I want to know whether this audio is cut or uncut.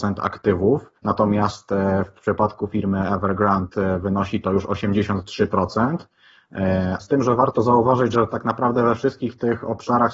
cut